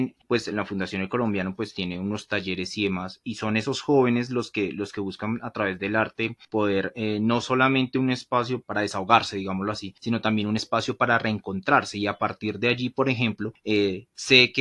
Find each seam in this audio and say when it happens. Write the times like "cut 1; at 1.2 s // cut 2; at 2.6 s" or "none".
none